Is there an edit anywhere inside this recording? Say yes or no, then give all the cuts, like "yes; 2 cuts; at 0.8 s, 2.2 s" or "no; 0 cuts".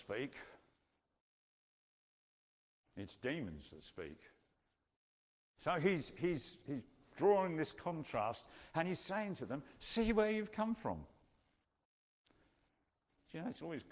no; 0 cuts